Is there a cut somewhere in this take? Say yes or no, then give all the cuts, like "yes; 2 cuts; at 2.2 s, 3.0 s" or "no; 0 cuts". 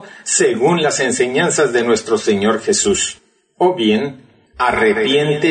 yes; 1 cut; at 3.5 s